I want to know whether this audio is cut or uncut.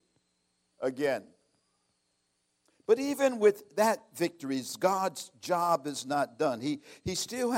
uncut